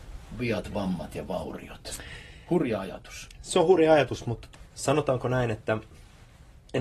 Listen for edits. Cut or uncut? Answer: uncut